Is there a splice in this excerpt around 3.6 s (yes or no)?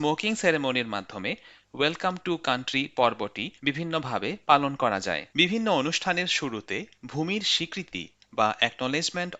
yes